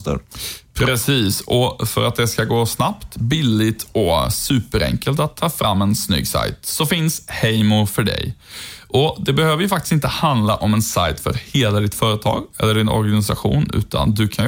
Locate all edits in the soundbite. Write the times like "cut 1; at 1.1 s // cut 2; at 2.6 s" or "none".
none